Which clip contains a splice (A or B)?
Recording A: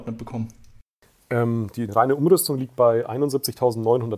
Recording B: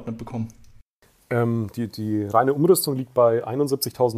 A